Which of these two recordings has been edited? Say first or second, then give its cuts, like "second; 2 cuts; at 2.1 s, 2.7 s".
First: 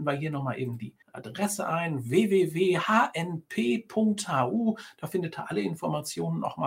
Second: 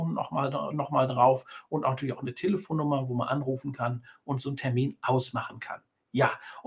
first; 1 cut; at 1.0 s